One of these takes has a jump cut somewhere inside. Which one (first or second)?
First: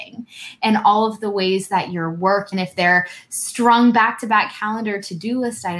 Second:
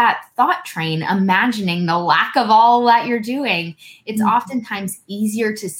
first